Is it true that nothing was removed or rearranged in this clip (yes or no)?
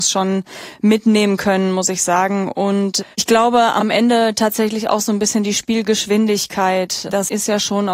no